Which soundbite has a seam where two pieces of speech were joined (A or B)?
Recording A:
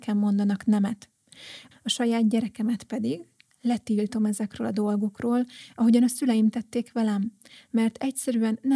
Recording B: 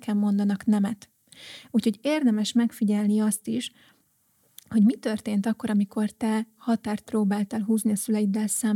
A